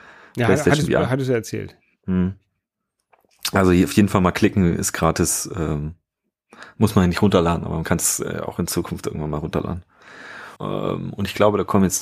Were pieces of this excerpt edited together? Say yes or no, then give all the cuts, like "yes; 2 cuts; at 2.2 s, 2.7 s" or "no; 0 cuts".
yes; 1 cut; at 10.6 s